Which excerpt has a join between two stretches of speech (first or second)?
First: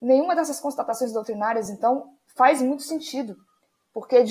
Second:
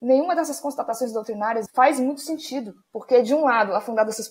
second